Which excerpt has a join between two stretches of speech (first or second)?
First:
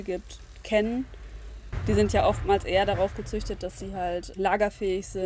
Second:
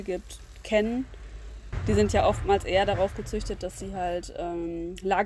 first